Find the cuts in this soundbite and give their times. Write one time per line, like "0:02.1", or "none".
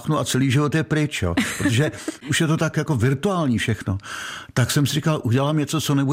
none